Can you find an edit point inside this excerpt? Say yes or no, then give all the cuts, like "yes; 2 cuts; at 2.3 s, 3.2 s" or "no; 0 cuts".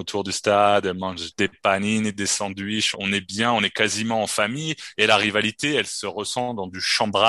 yes; 1 cut; at 2.9 s